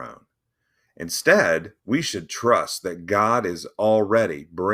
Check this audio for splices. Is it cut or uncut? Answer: cut